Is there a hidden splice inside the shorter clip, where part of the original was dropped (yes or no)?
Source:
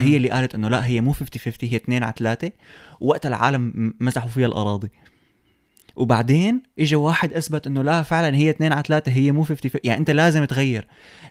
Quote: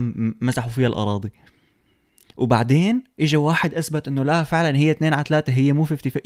no